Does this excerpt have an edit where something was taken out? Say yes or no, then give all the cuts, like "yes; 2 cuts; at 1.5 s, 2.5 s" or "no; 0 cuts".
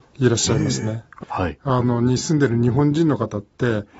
yes; 1 cut; at 1.2 s